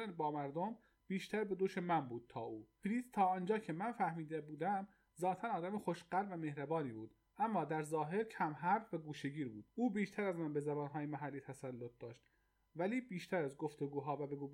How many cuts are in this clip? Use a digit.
1